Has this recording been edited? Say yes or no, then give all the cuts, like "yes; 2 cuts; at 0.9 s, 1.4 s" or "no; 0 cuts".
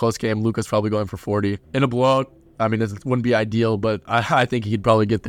yes; 1 cut; at 1.6 s